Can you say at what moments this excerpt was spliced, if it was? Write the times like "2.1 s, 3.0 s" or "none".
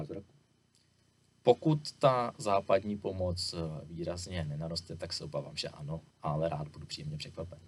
6.1 s